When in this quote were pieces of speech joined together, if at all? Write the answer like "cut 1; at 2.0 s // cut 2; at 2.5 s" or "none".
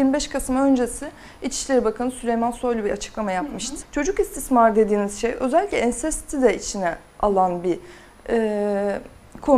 cut 1; at 3.8 s